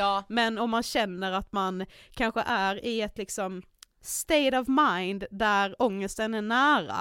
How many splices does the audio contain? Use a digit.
0